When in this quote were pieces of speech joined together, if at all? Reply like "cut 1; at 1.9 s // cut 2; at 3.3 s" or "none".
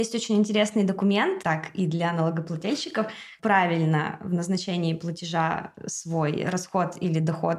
cut 1; at 1.4 s // cut 2; at 3.4 s